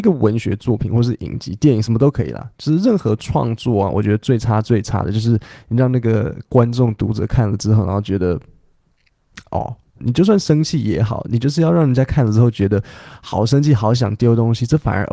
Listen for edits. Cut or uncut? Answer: cut